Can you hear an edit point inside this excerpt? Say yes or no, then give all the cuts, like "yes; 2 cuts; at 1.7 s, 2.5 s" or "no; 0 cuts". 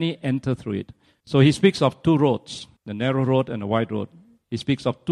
yes; 2 cuts; at 1.2 s, 2.8 s